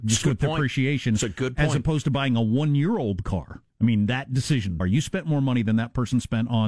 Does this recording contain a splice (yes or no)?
yes